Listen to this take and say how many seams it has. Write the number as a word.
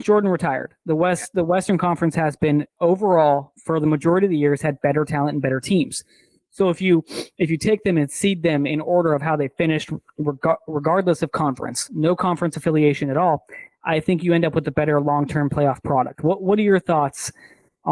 zero